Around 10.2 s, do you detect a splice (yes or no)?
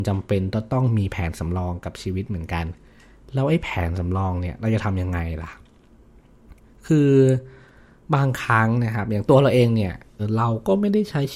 yes